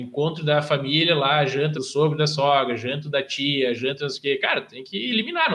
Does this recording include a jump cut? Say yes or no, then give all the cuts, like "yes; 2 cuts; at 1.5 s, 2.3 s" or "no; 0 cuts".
yes; 1 cut; at 1.7 s